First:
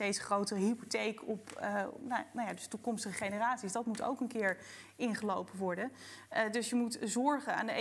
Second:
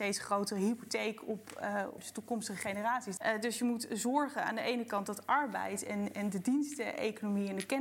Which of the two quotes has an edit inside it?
second; 2 cuts; at 2.0 s, 3.2 s

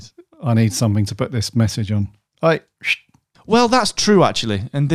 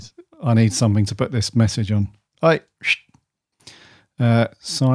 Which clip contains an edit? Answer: first; 1 cut; at 3.3 s

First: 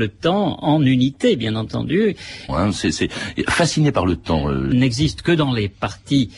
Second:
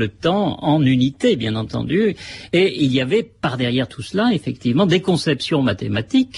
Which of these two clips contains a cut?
first; 2 cuts; at 2.5 s, 4.7 s

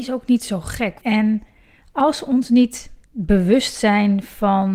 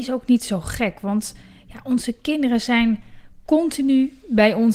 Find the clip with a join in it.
first; 2 cuts; at 1.0 s, 3.0 s

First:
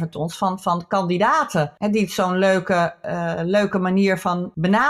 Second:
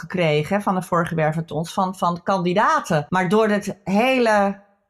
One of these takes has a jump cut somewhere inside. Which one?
second; 1 cut; at 3.1 s

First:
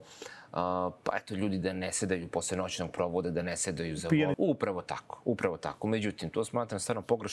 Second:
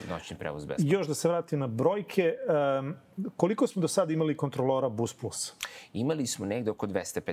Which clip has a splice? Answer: first; 1 cut; at 4.3 s

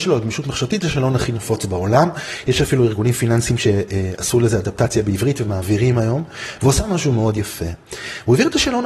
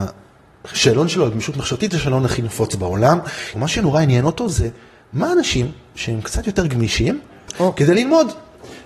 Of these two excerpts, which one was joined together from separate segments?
second; 2 cuts; at 3.5 s, 7.5 s

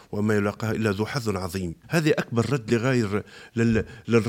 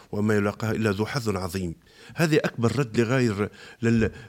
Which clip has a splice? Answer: first; 1 cut; at 1.8 s

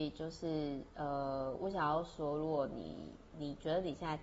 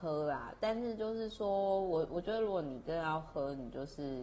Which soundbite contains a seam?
first; 1 cut; at 1.6 s

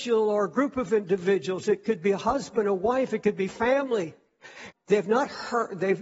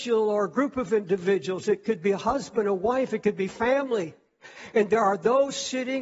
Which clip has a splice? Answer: first; 1 cut; at 4.7 s

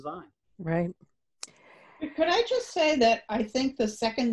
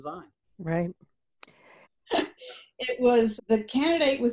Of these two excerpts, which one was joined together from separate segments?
second; 2 cuts; at 1.8 s, 3.4 s

